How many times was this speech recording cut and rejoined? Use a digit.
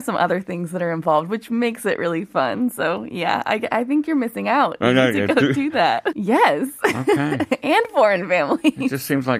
1